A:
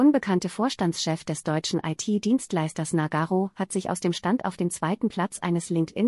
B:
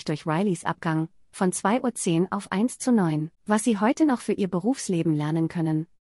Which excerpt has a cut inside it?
B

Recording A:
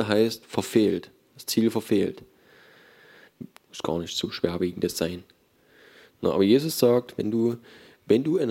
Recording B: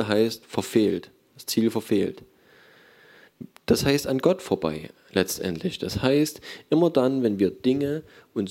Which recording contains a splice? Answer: A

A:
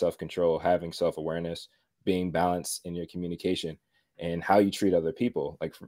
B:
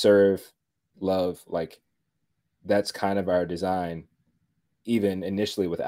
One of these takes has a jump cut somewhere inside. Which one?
B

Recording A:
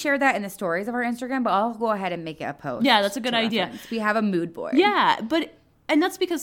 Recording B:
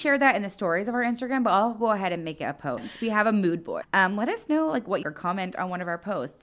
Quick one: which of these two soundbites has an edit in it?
B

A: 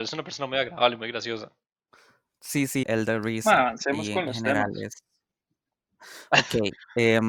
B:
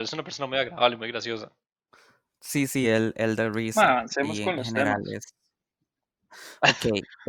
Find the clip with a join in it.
A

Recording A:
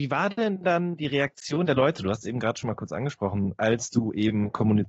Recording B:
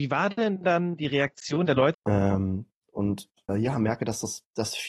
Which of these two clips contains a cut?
B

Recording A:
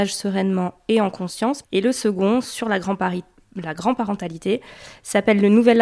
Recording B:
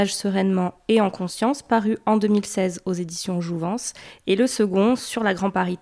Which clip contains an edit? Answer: A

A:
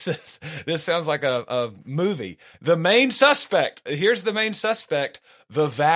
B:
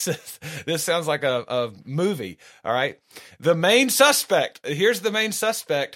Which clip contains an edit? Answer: A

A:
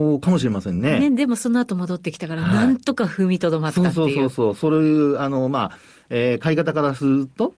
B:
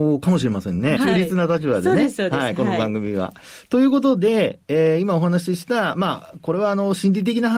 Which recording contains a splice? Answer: B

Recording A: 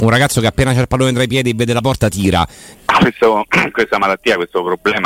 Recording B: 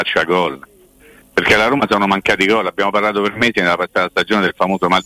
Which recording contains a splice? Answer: A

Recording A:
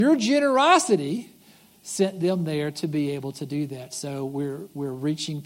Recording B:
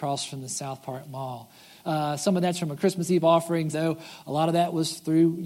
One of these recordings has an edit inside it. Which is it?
B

